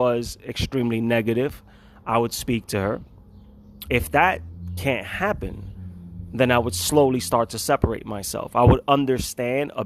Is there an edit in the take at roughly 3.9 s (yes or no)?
yes